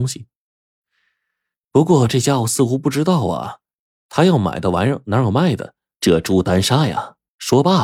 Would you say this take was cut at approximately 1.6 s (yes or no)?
no